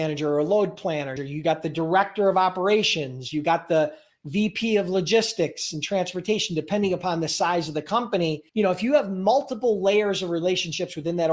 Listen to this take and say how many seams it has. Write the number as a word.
two